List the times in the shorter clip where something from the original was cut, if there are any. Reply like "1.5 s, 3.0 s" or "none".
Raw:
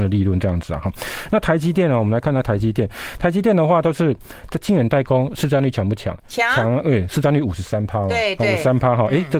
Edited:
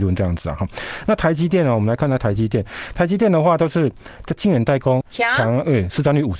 5.0 s